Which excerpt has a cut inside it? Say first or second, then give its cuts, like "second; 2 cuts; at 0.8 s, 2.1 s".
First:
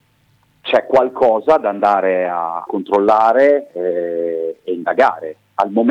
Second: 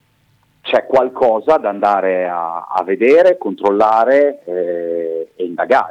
first; 1 cut; at 2.7 s